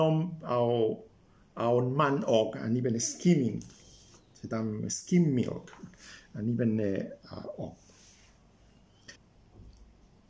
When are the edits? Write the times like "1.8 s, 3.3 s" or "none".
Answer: 7.2 s

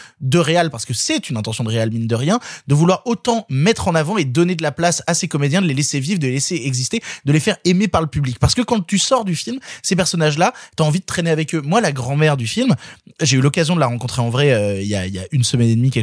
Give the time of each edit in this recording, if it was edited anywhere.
none

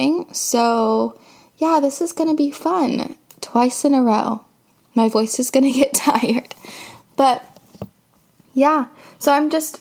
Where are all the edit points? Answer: none

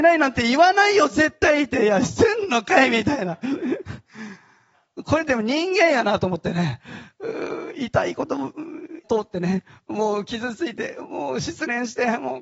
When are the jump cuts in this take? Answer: 9.0 s

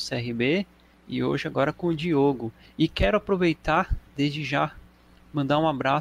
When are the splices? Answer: none

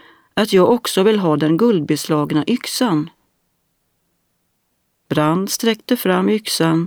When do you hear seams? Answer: 4.9 s

